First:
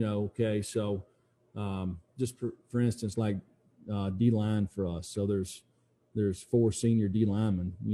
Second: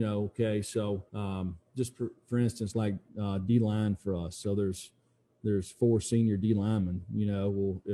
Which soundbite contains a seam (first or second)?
second